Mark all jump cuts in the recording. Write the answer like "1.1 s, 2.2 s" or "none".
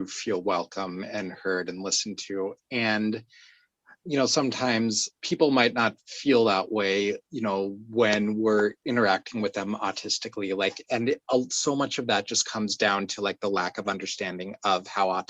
5.2 s